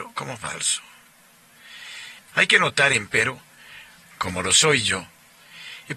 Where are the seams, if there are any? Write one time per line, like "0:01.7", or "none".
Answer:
0:02.2
0:04.0